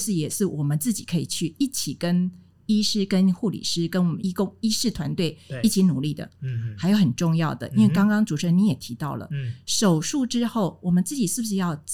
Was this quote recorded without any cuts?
no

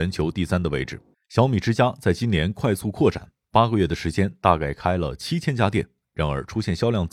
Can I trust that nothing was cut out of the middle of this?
no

